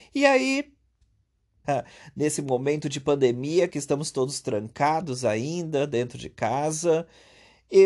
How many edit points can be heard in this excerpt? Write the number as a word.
one